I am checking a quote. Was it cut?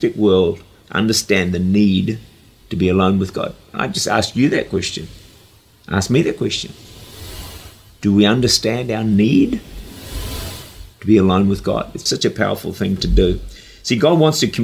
yes; 1 cut; at 12.1 s

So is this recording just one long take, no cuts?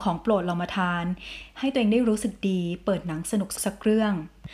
no; 1 cut; at 3.6 s

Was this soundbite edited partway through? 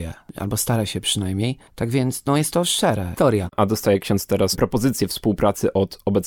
yes; 1 cut; at 3.2 s

